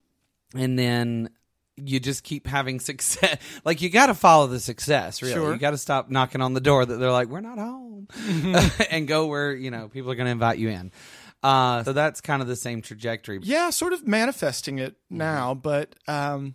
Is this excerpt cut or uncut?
cut